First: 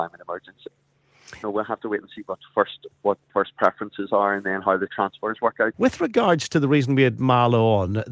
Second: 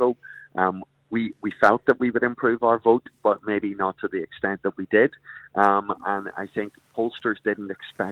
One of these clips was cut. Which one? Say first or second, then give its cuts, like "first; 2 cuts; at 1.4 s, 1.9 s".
first; 2 cuts; at 1.4 s, 5.7 s